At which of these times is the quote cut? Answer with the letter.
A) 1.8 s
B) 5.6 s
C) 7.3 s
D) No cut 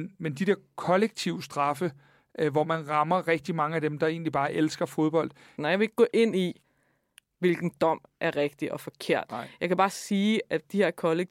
B